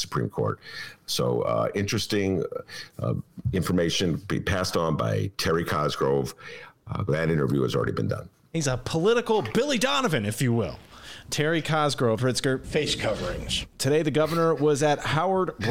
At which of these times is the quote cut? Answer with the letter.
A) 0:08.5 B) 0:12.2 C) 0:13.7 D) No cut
B